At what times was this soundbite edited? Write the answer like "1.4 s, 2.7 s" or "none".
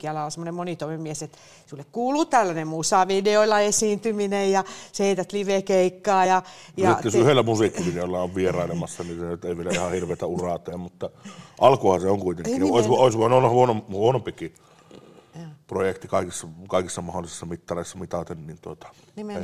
none